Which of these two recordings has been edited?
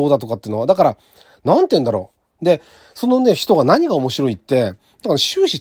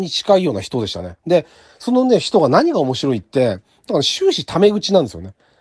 first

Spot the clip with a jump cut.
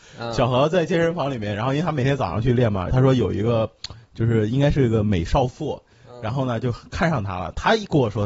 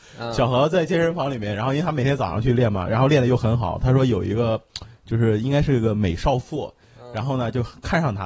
first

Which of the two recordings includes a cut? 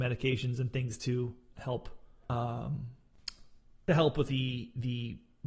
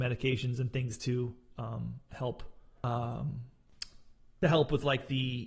first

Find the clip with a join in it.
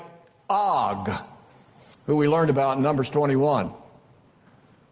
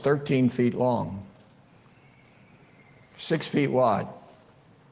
first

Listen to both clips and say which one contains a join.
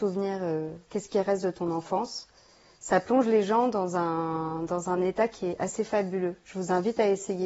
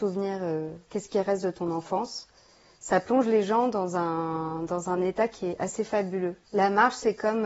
second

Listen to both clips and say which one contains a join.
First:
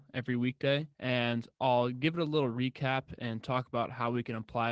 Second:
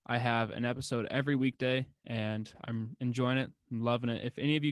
first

